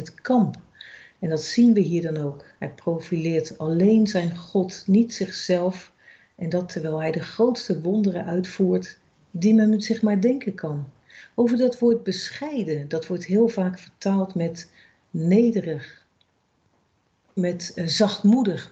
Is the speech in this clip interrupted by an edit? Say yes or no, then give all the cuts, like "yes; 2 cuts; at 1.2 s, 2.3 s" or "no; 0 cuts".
yes; 1 cut; at 17.4 s